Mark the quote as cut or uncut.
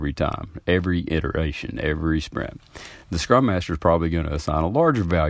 uncut